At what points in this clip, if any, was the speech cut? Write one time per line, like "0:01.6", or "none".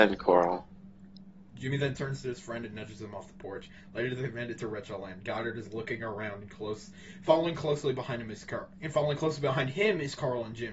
0:08.7